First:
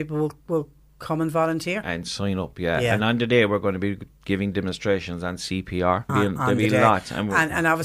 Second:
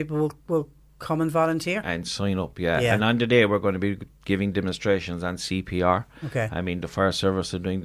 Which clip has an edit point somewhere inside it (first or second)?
first